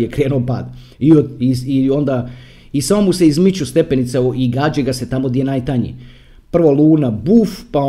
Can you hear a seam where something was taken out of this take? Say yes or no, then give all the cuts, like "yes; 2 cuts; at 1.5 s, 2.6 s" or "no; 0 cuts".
yes; 1 cut; at 0.9 s